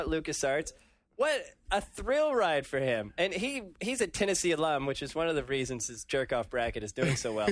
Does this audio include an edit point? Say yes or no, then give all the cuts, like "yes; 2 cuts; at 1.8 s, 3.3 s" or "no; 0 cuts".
no; 0 cuts